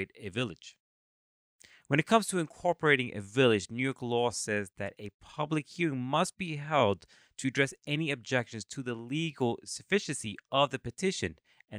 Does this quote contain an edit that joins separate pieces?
no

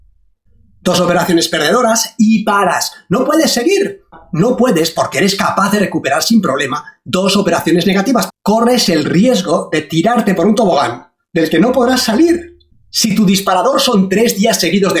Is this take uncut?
no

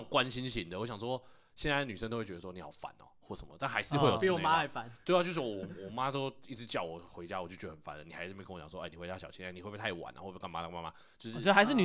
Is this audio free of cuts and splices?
yes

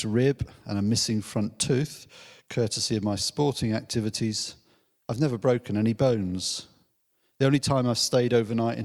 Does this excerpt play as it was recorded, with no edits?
yes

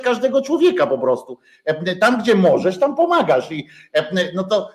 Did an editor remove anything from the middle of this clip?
no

